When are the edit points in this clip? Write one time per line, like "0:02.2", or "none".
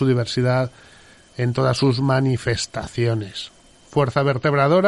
0:03.8